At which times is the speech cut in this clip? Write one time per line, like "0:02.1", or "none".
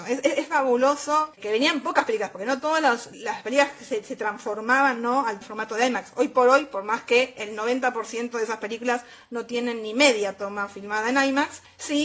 0:01.3